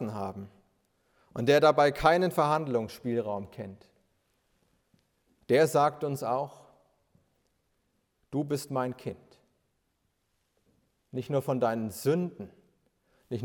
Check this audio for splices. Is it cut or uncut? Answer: cut